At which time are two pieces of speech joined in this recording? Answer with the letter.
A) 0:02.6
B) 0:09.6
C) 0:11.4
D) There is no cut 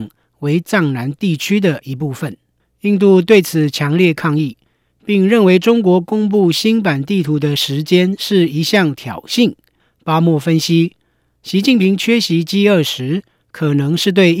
D